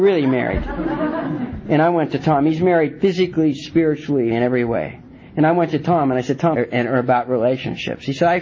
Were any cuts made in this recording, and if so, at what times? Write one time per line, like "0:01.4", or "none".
0:04.3
0:06.5